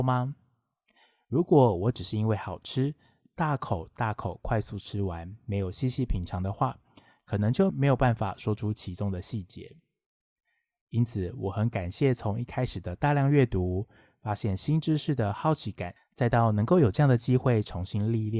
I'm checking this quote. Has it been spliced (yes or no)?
yes